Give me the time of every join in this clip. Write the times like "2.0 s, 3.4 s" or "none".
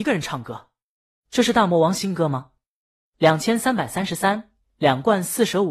3.0 s

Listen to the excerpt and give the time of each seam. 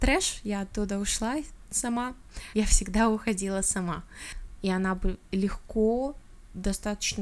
2.5 s, 4.6 s

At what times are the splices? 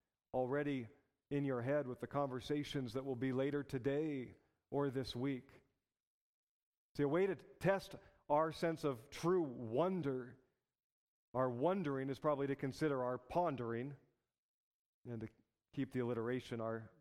none

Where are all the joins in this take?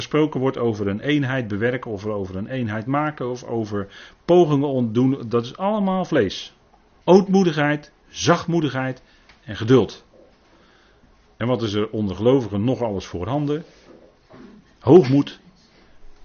7.0 s

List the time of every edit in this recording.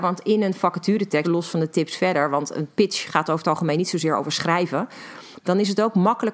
1.2 s, 5.4 s

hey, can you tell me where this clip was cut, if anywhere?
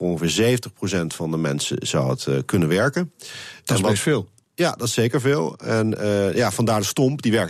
none

